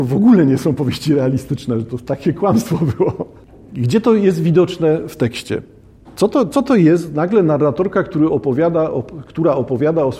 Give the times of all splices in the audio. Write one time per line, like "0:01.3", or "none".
none